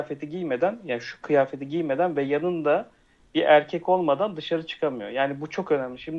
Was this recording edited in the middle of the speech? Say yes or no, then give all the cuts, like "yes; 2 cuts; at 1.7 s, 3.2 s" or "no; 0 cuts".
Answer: no; 0 cuts